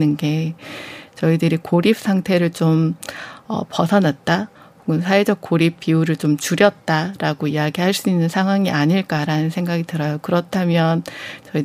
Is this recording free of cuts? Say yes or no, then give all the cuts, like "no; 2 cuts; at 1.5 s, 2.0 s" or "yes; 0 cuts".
yes; 0 cuts